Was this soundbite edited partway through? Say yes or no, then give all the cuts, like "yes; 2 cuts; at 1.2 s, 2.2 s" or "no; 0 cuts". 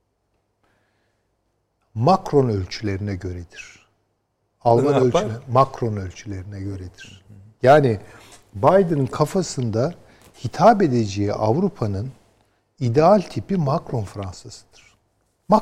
no; 0 cuts